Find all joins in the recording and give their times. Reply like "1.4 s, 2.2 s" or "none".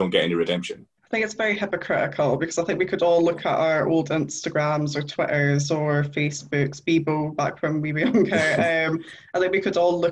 1.0 s